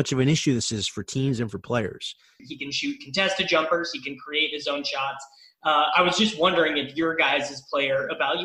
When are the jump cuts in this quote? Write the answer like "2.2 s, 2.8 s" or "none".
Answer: 2.4 s